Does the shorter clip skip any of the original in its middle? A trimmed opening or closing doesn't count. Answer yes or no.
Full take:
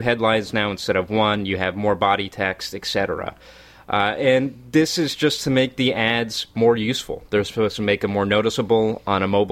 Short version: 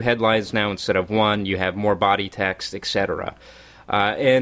no